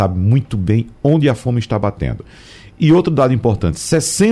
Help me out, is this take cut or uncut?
uncut